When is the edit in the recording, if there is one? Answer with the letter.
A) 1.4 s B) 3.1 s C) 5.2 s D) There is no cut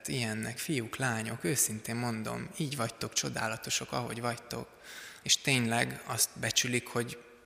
C